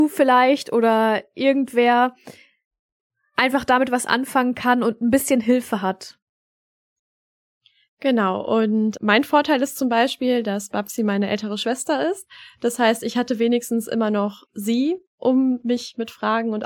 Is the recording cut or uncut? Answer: uncut